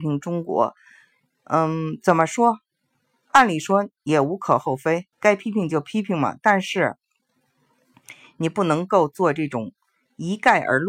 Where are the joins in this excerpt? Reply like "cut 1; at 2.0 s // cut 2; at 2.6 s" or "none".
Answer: cut 1; at 5.1 s

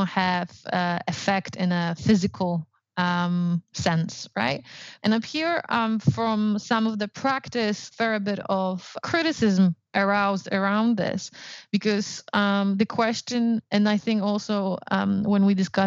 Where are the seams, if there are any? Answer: cut 1; at 5.0 s // cut 2; at 7.9 s // cut 3; at 9.0 s

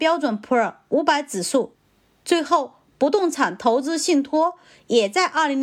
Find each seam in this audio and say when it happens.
none

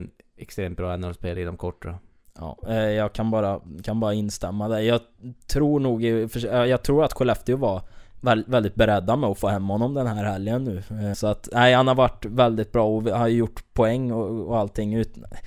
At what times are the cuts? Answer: cut 1; at 11.1 s

